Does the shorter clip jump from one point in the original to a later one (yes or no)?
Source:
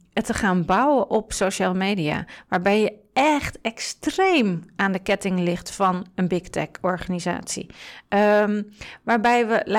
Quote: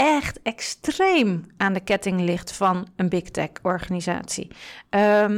no